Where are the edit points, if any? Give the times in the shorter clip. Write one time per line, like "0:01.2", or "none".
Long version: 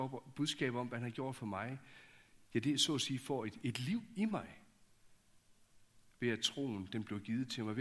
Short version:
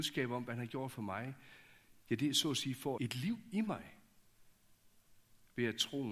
0:03.0

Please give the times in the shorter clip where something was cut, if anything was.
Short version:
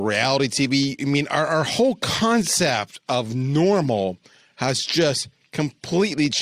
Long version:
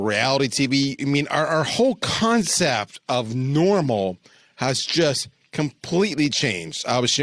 none

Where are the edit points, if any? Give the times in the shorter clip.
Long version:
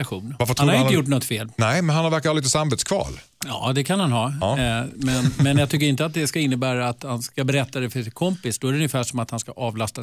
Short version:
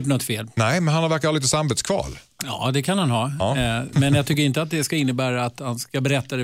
0:03.9

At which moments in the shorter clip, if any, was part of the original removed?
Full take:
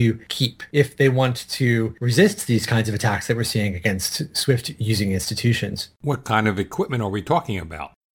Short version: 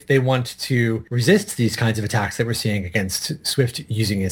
none

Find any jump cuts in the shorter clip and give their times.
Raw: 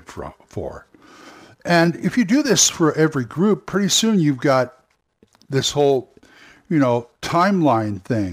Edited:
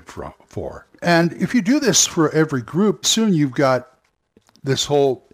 0:01.0
0:03.0

